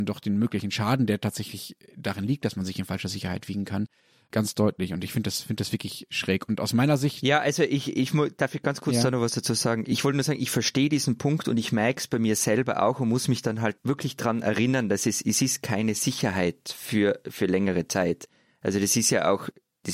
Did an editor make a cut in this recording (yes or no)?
no